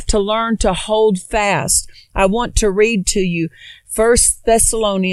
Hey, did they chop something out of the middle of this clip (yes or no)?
no